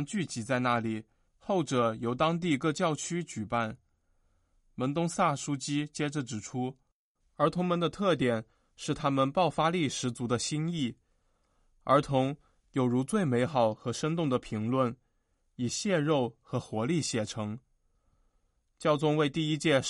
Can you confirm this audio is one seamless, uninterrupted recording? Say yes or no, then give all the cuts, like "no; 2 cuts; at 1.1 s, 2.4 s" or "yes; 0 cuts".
yes; 0 cuts